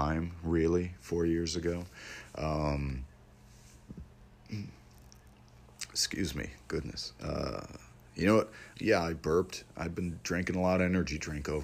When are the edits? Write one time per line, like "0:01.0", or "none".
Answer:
0:08.7